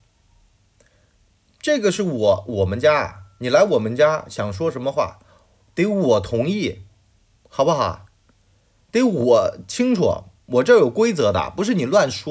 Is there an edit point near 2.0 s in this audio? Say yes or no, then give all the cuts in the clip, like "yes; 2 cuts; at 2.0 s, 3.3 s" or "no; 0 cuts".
no; 0 cuts